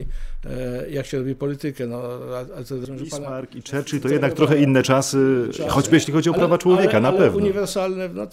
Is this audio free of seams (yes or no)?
yes